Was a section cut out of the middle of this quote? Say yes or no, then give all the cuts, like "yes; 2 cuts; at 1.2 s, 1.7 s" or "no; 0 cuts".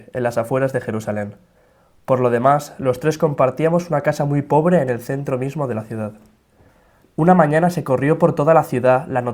yes; 1 cut; at 7.0 s